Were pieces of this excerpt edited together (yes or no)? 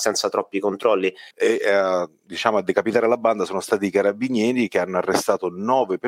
yes